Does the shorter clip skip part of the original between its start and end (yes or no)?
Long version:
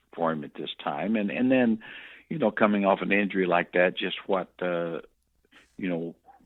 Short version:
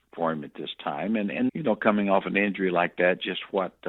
yes